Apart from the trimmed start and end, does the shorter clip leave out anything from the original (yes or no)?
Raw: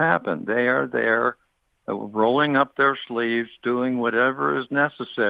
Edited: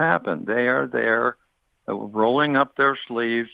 no